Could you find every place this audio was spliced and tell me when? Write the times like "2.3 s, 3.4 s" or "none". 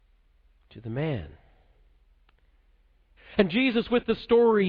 3.2 s